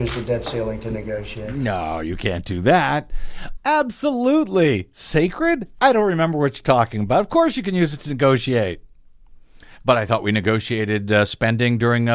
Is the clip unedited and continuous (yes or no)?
no